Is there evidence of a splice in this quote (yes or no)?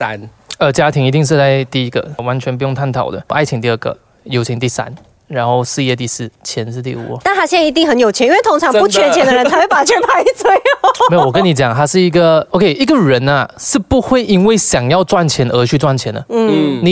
no